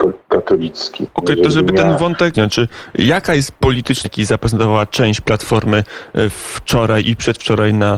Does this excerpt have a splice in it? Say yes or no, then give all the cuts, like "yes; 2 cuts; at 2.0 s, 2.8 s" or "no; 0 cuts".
yes; 2 cuts; at 2.3 s, 4.0 s